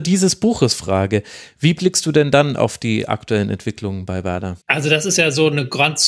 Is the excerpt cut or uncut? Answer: cut